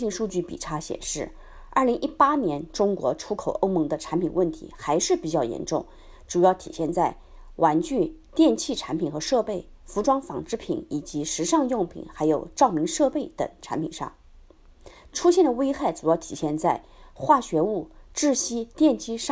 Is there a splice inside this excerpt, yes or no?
no